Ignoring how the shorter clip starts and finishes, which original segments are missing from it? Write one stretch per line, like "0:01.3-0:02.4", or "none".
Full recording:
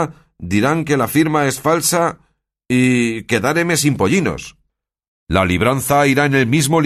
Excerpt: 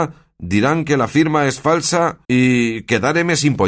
0:02.2-0:02.6